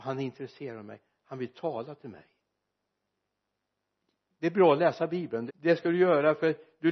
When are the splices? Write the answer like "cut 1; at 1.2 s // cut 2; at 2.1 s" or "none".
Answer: cut 1; at 5.5 s